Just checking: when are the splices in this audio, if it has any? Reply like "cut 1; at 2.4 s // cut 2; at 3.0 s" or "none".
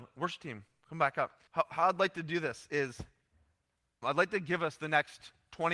cut 1; at 1.5 s // cut 2; at 4.0 s

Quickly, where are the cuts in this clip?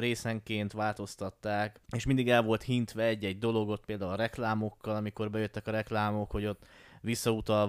cut 1; at 1.9 s

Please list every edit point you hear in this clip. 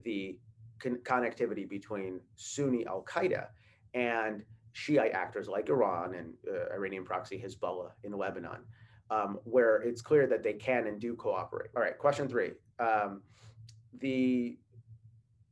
cut 1; at 11.7 s

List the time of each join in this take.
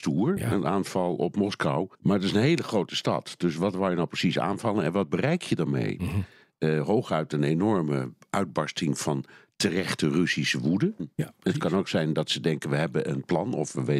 cut 1; at 1.9 s // cut 2; at 11.0 s

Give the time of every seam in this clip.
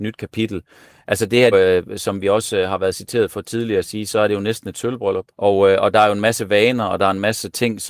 cut 1; at 1.5 s // cut 2; at 5.3 s

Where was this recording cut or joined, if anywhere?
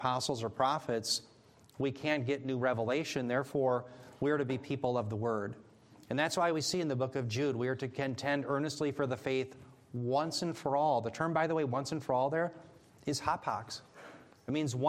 none

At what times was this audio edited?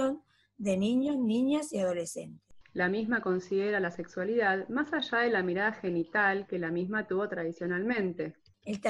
cut 1; at 2.6 s

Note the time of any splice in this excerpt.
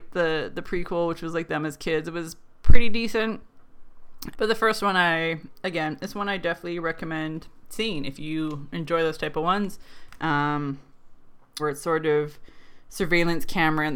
cut 1; at 4.3 s // cut 2; at 10.2 s // cut 3; at 11.6 s

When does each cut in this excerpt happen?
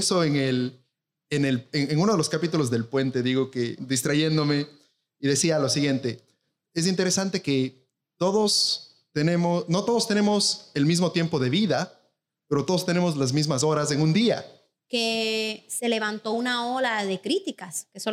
cut 1; at 3.8 s // cut 2; at 14.8 s

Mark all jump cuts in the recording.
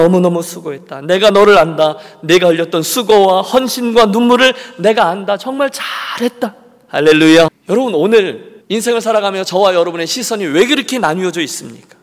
cut 1; at 7.5 s // cut 2; at 8.6 s

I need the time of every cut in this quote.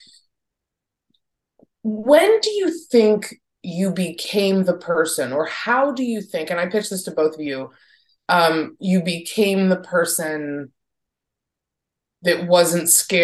none

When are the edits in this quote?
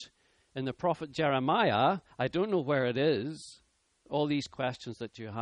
cut 1; at 4.0 s

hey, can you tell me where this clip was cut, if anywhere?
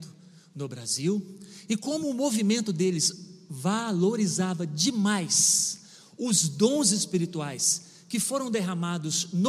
none

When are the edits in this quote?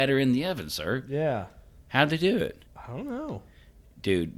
cut 1; at 2.7 s

